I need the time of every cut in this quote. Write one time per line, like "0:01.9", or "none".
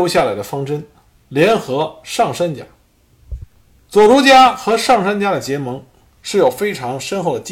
none